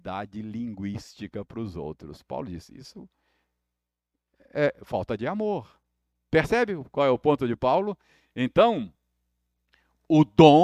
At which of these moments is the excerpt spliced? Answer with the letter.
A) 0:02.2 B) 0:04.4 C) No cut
C